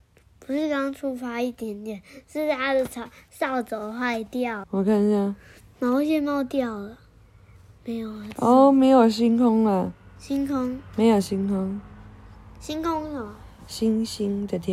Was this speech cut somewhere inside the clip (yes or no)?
yes